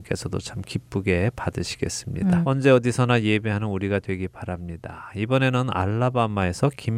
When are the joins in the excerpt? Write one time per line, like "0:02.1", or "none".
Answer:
0:02.4